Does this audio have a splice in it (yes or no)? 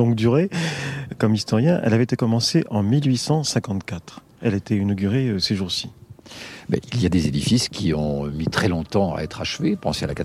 no